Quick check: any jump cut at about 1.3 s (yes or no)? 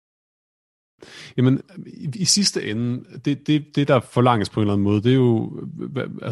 no